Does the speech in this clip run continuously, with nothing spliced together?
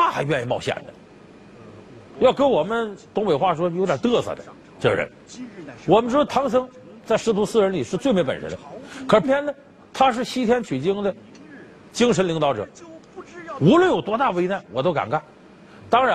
no; 1 cut; at 9.2 s

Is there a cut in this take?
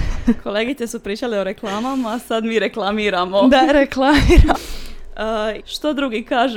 yes; 2 cuts; at 4.5 s, 5.6 s

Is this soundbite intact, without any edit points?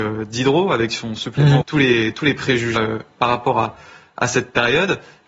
no; 2 cuts; at 1.6 s, 2.8 s

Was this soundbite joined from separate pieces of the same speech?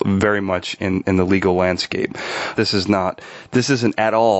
yes; 1 cut; at 2.5 s

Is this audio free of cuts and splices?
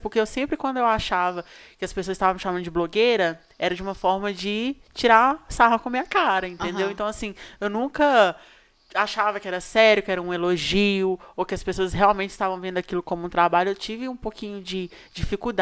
yes; 0 cuts

